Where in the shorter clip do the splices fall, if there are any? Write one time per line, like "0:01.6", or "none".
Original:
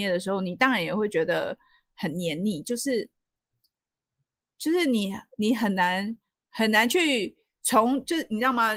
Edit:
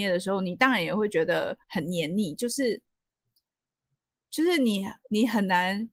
0:01.6